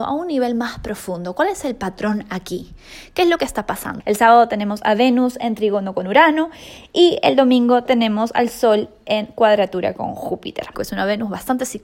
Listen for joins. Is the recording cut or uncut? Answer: cut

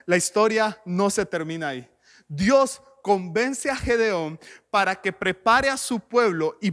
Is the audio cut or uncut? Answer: uncut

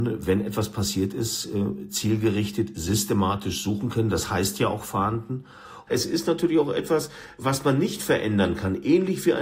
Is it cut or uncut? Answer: cut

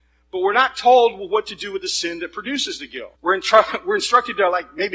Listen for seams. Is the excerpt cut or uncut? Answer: cut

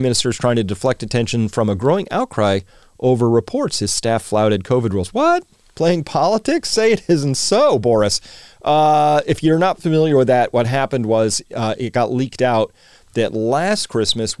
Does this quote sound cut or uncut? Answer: uncut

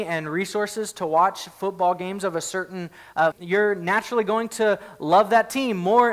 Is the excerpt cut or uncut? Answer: cut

